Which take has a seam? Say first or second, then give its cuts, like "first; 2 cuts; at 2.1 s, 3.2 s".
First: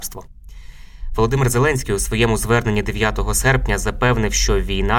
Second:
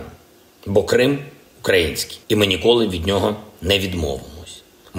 second; 1 cut; at 2.2 s